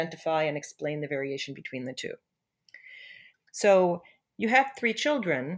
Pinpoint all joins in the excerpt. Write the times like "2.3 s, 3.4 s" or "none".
3.3 s